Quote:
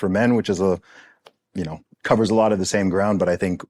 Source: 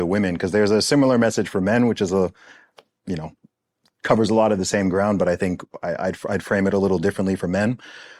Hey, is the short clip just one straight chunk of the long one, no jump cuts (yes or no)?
no